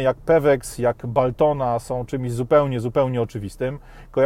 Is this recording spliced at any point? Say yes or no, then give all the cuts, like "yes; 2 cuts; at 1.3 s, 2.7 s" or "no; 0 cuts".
no; 0 cuts